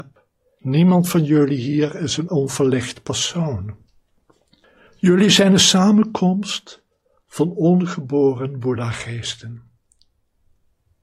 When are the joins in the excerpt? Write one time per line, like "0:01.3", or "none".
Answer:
none